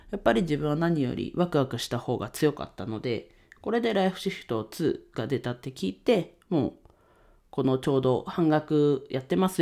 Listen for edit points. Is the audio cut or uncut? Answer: cut